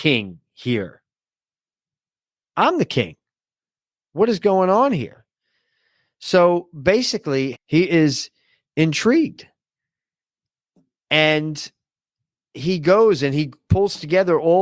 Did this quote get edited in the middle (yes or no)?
yes